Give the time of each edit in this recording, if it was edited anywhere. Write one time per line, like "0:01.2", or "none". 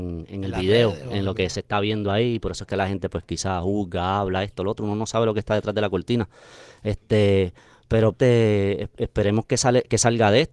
0:08.1

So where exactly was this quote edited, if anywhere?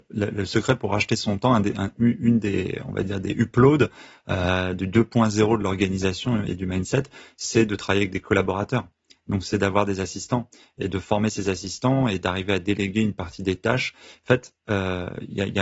none

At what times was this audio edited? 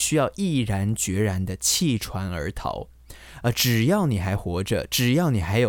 none

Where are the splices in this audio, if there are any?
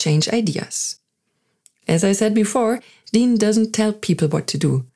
none

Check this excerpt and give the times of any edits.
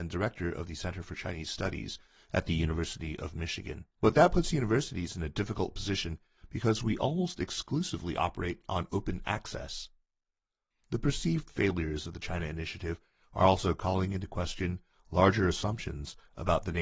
0:03.9
0:10.7

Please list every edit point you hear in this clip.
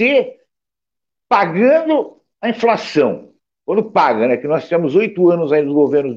none

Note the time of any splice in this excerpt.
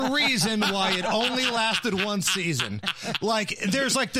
none

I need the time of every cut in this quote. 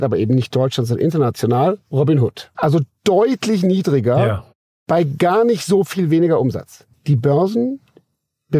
0:02.5
0:06.9

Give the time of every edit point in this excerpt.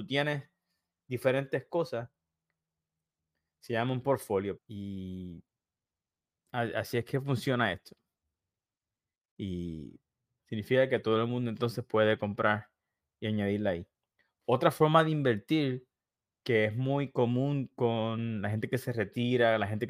0:04.6
0:10.4

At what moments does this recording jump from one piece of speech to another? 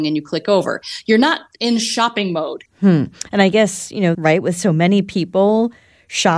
0:02.7
0:04.1

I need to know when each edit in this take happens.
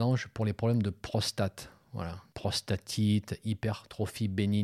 0:02.3

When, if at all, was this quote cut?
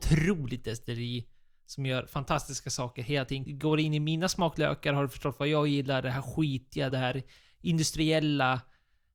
0:03.5
0:06.9

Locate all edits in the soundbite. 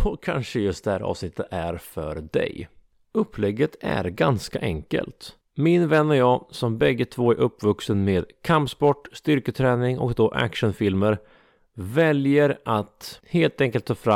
0:03.0

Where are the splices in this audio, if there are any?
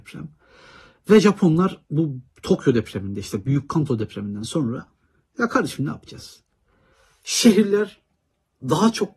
none

